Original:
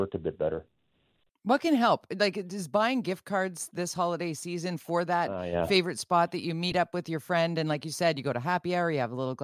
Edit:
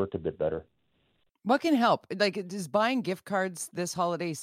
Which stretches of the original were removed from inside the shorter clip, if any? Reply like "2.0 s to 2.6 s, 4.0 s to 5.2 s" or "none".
none

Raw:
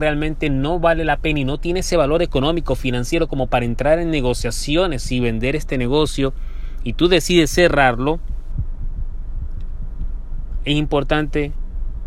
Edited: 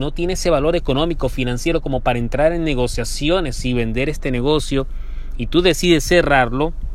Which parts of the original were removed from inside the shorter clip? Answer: none

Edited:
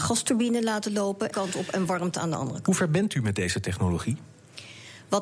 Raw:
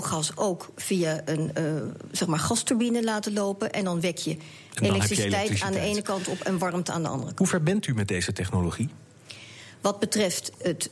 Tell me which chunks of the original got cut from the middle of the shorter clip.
3.7 s to 6.0 s

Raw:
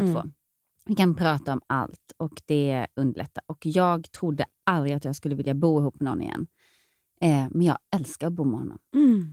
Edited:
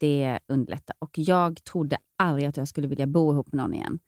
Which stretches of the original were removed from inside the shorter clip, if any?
none

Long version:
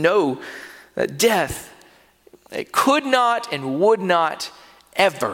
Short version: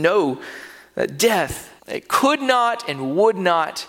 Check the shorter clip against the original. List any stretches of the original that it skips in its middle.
1.8 s to 2.4 s

